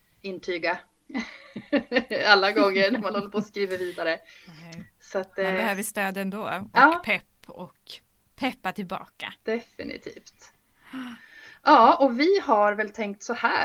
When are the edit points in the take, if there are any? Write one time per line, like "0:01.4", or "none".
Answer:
none

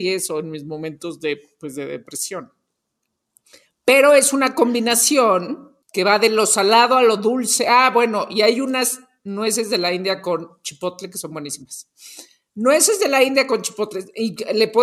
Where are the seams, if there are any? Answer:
0:05.8

